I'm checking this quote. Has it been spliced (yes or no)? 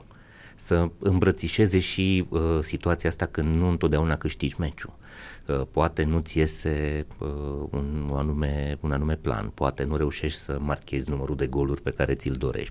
no